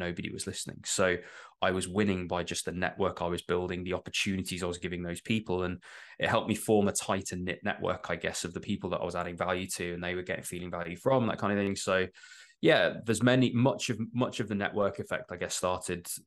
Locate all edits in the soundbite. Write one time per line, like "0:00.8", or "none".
none

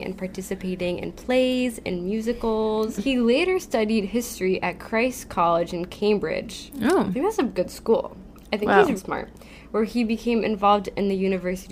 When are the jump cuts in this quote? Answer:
0:03.0
0:09.0

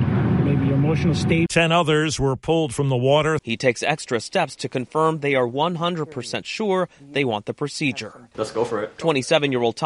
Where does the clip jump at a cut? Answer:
0:03.4

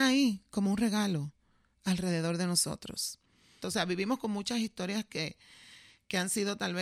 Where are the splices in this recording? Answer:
0:03.6

